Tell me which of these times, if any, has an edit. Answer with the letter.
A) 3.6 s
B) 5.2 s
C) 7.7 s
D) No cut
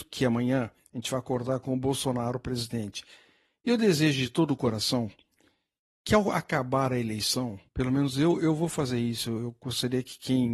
C